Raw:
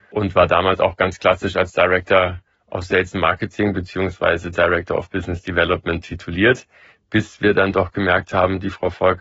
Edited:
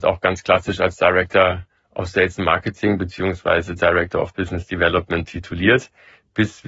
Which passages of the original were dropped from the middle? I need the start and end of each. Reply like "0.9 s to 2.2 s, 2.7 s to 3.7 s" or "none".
none